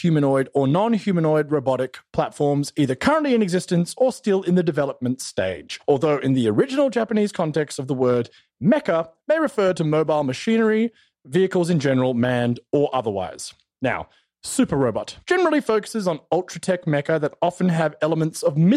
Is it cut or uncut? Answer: uncut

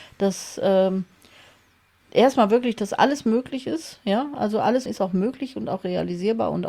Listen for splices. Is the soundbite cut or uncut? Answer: cut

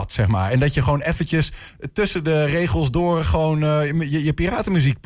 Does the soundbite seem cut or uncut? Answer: uncut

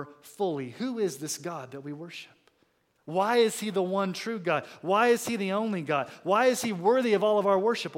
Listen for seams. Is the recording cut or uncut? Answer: uncut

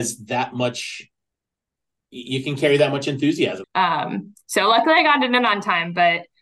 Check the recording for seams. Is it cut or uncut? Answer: cut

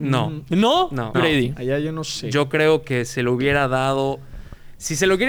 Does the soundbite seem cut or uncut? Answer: cut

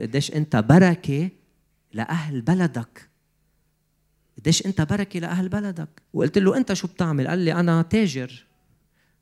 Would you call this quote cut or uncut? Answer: cut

